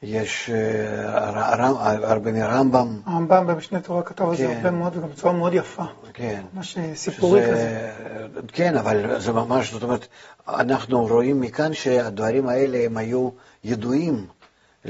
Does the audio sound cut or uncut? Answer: uncut